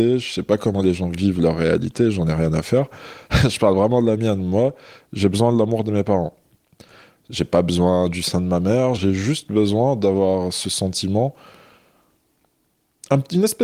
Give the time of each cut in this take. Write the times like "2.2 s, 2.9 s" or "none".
9.0 s